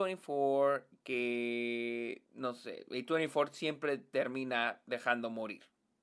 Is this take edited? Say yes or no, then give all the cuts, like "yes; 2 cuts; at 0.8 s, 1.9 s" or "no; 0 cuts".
yes; 1 cut; at 2.2 s